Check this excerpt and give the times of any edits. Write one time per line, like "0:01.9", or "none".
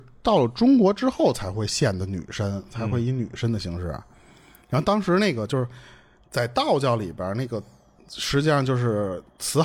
none